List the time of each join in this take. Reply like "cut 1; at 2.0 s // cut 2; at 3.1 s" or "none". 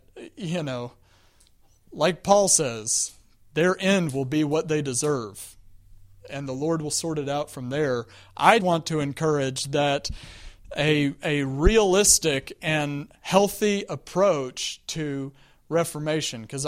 cut 1; at 8.6 s